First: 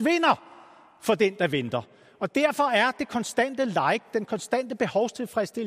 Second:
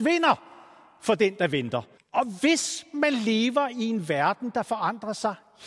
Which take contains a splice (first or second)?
second